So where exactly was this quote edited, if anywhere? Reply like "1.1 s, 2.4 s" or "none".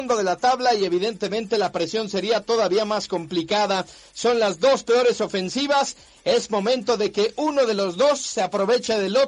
none